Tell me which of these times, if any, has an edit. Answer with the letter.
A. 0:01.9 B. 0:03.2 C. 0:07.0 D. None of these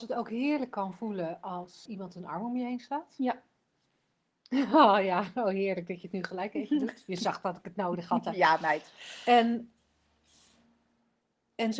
A